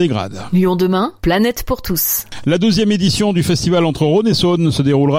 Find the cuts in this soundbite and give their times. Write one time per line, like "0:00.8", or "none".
0:01.2